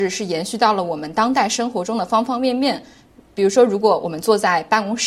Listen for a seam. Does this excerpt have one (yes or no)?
no